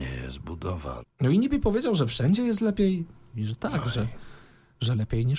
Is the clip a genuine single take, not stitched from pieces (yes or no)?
no